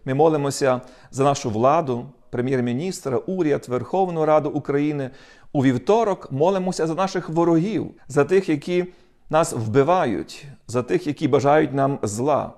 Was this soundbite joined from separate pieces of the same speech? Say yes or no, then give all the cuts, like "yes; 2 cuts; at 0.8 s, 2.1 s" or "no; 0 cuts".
yes; 2 cuts; at 2.2 s, 8.0 s